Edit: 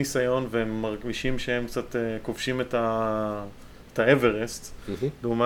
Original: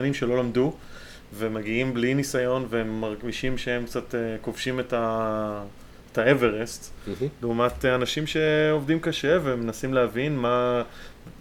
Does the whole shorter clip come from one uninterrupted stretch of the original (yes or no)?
yes